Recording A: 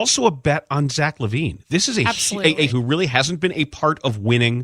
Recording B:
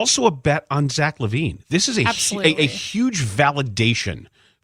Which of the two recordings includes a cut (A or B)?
A